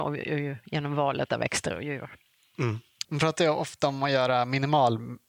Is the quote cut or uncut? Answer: cut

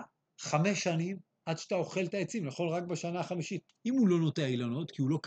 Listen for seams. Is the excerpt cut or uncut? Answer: cut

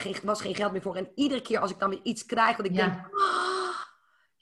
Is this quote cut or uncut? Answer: uncut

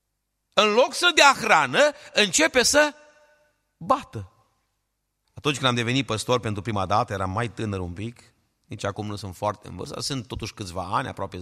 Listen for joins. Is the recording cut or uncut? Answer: cut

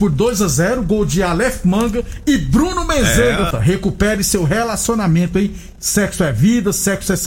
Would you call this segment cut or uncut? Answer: cut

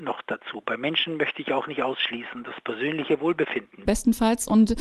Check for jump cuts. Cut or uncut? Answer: cut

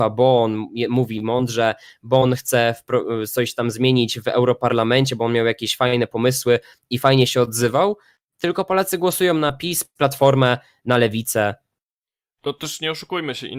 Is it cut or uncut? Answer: uncut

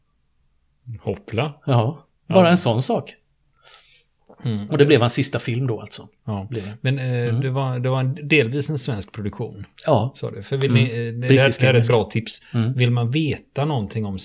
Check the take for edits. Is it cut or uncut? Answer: uncut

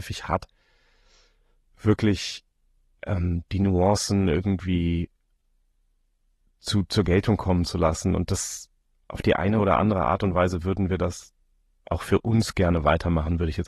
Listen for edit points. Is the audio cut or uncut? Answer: uncut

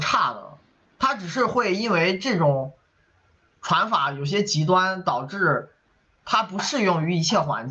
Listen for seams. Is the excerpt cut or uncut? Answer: uncut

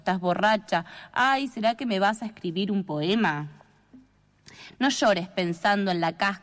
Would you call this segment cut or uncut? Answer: uncut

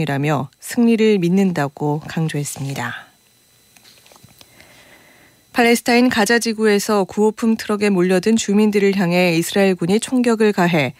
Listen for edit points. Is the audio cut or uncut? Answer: uncut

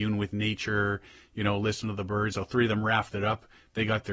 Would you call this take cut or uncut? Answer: cut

